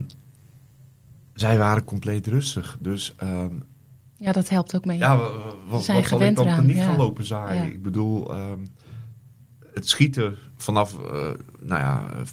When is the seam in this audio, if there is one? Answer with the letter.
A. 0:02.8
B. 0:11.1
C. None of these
C